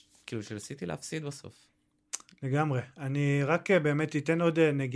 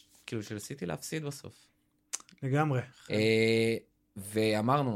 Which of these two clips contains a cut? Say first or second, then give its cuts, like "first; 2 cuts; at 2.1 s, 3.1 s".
second; 1 cut; at 2.9 s